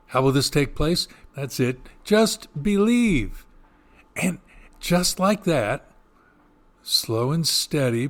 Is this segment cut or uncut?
cut